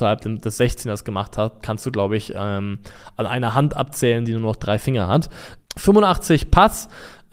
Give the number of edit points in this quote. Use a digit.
1